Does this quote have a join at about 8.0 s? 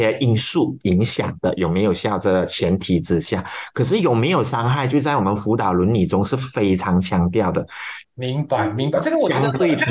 yes; 1 cut; at 8.0 s

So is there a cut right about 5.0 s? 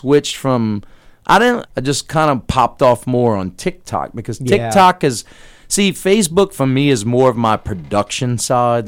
no; 1 cut; at 1.6 s

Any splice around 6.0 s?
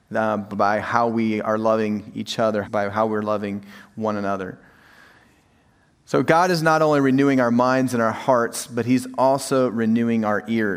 no; 1 cut; at 2.6 s

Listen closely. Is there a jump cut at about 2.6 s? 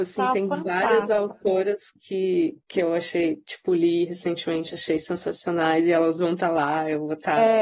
yes; 1 cut; at 2.6 s

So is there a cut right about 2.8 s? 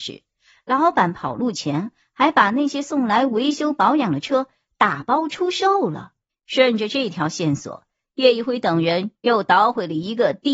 no; 1 cut; at 6.3 s

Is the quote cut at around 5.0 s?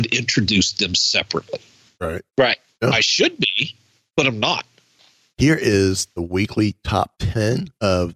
yes; 2 cuts; at 2.7 s, 5.0 s

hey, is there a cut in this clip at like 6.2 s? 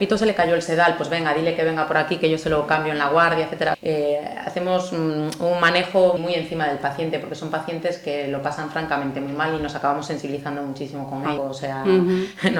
yes; 3 cuts; at 3.7 s, 6.2 s, 11.4 s

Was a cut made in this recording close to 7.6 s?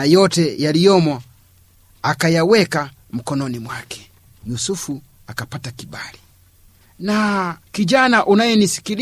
yes; 1 cut; at 7.6 s

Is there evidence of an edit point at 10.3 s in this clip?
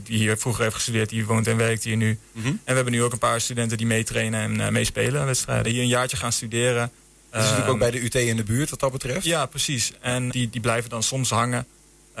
yes; 2 cuts; at 5.6 s, 10.3 s

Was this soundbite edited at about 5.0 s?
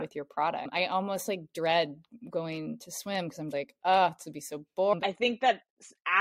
yes; 2 cuts; at 3.5 s, 5.0 s

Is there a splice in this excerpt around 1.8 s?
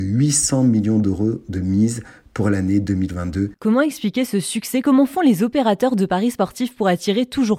no; 1 cut; at 3.5 s

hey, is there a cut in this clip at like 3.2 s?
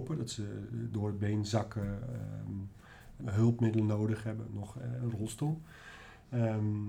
yes; 2 cuts; at 3.2 s, 4.5 s

